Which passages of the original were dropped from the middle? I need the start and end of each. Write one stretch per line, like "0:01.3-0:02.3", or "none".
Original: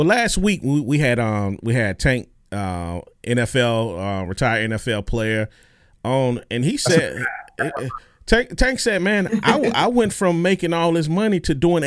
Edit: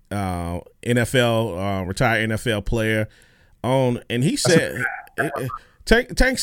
none